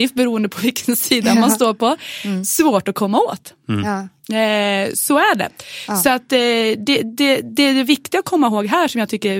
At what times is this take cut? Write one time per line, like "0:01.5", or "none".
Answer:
none